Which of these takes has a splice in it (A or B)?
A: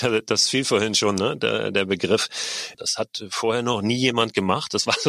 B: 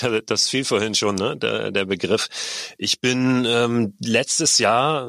A